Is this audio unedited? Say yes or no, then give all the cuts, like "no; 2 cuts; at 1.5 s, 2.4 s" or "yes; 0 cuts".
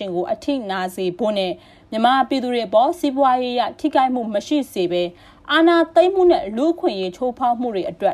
yes; 0 cuts